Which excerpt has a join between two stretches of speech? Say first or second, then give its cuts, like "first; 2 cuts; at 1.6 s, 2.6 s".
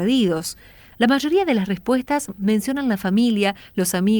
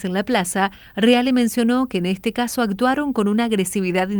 first; 1 cut; at 0.9 s